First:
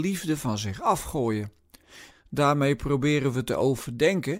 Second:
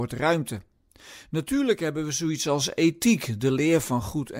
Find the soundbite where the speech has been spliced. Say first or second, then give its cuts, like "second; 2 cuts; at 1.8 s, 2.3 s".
first; 1 cut; at 2.1 s